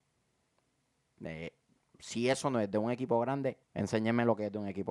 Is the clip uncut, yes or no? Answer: no